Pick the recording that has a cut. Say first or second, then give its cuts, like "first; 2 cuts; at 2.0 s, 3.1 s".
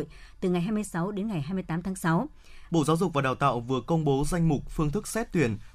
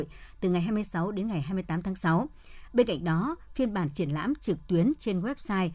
first; 1 cut; at 2.7 s